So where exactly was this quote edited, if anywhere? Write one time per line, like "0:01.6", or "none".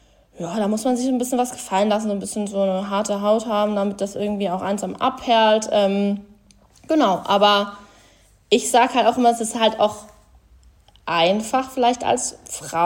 none